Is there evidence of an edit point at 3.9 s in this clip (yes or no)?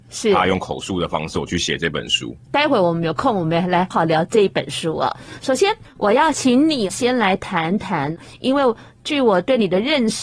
yes